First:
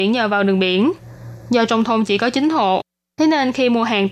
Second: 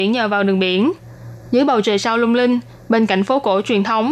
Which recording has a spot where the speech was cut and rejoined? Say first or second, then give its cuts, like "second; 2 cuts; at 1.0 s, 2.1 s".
second; 1 cut; at 1.4 s